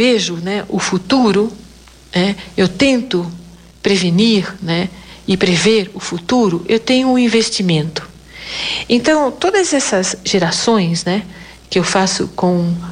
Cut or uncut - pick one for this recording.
uncut